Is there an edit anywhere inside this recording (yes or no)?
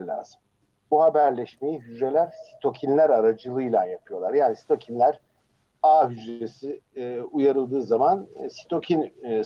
no